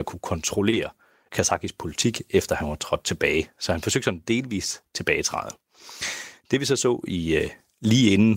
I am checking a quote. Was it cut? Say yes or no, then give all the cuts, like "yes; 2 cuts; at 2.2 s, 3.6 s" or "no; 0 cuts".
no; 0 cuts